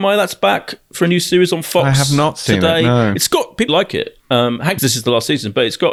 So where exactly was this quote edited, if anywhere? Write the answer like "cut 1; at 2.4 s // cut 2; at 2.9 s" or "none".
cut 1; at 3.7 s // cut 2; at 4.8 s